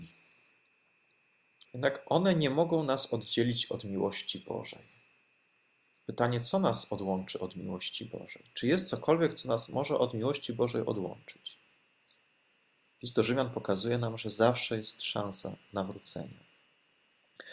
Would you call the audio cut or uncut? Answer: cut